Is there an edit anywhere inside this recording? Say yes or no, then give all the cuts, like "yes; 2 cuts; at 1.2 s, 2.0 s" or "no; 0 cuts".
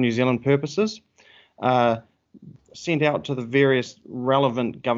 yes; 1 cut; at 2.5 s